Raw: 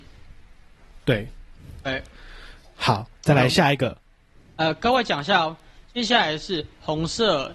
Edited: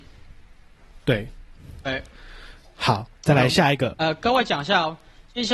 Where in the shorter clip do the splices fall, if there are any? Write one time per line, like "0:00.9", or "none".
0:03.9

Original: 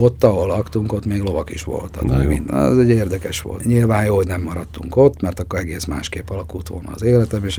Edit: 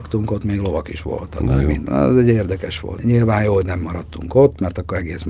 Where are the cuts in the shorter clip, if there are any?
none

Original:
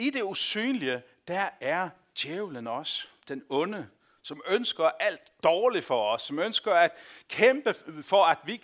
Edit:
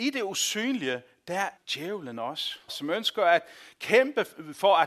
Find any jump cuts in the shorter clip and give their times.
0:01.6
0:02.7

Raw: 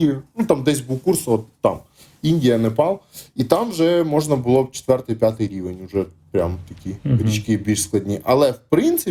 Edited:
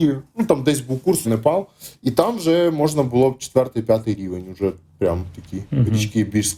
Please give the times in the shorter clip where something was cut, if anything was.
0:01.2

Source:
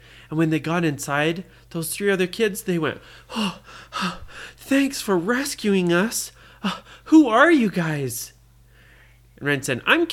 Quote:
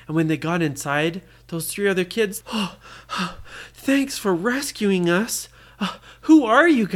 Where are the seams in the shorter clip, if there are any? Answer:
0:02.4

